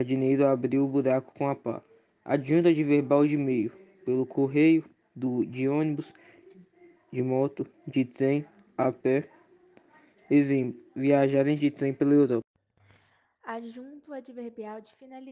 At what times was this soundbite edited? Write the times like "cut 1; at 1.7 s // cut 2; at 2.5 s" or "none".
cut 1; at 7.0 s